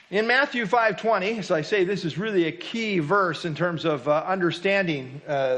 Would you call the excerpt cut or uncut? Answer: uncut